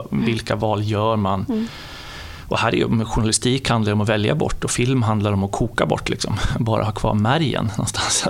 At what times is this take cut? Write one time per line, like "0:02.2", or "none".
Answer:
none